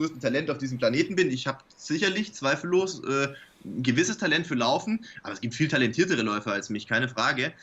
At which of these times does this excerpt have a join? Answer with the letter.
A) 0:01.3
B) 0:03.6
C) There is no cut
C